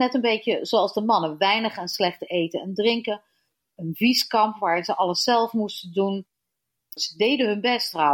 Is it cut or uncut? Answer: cut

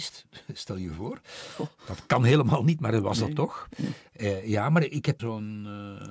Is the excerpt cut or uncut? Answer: cut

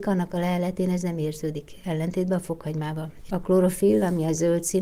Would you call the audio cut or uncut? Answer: cut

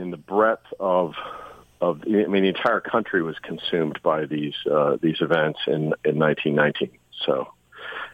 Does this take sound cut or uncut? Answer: uncut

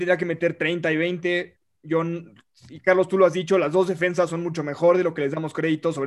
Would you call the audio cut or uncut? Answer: uncut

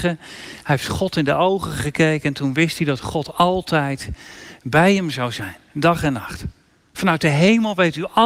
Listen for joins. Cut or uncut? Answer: cut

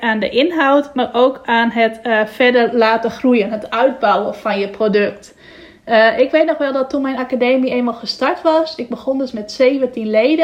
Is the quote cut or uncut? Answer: uncut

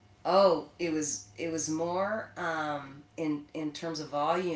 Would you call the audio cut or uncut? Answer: uncut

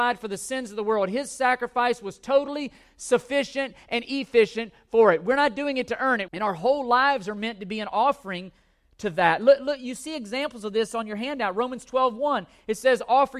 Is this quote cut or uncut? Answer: cut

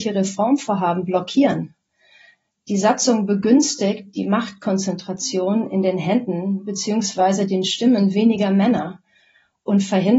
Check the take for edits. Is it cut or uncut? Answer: uncut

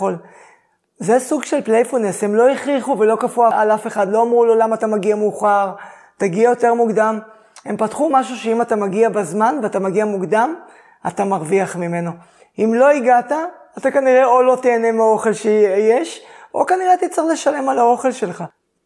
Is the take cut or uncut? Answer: uncut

